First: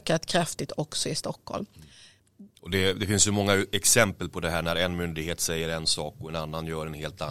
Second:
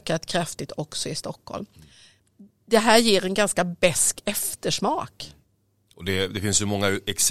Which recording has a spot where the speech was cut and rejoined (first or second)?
first